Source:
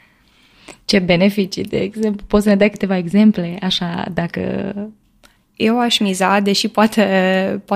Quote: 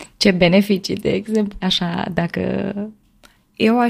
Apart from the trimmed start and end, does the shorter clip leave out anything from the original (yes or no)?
yes